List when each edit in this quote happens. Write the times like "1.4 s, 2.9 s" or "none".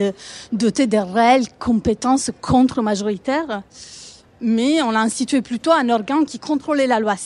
none